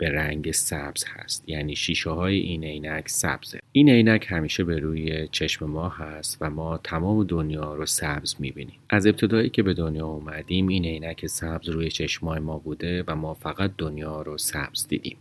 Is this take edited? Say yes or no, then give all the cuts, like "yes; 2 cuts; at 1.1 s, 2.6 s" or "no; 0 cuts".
yes; 1 cut; at 8.8 s